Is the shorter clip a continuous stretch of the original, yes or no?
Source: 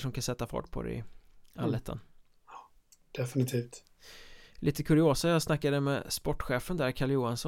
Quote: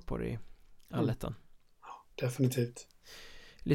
no